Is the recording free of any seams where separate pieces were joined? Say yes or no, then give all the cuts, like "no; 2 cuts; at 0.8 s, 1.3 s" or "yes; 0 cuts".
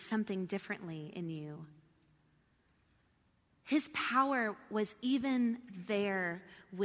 yes; 0 cuts